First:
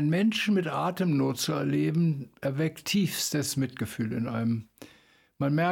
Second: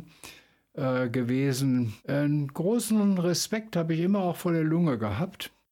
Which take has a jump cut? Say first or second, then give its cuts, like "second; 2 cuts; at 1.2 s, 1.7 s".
second; 1 cut; at 2.0 s